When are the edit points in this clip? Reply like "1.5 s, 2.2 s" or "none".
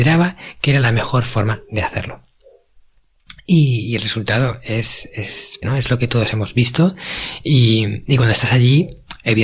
5.6 s